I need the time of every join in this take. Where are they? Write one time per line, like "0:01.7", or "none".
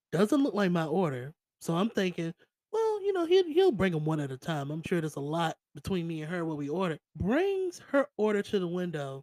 0:04.8
0:07.0